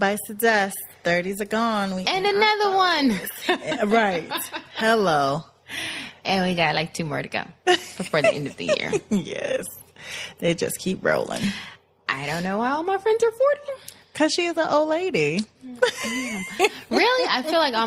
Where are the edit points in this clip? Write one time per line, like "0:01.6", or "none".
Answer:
none